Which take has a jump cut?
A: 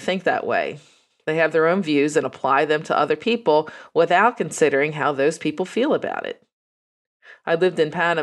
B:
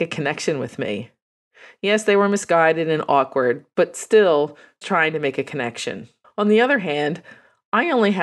B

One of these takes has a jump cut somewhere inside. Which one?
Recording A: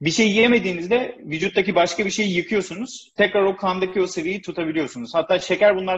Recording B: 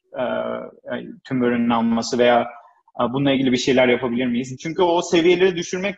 B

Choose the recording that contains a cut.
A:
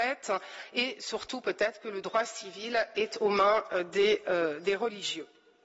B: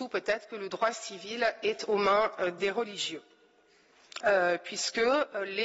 B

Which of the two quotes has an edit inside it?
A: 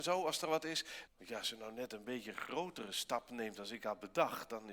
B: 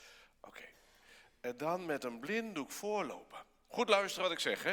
A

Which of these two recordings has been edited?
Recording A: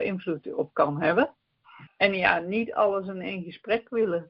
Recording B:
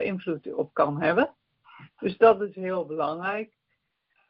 A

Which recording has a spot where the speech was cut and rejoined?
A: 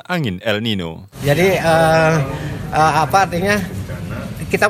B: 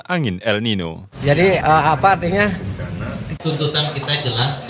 B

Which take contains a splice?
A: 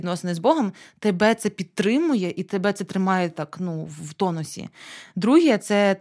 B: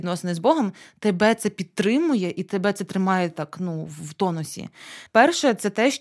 B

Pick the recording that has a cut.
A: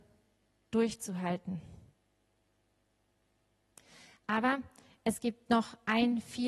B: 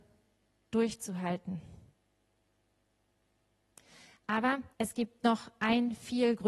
B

